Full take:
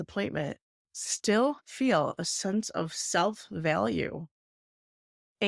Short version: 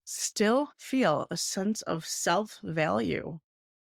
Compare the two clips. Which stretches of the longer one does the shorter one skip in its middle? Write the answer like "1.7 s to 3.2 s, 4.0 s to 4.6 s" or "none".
none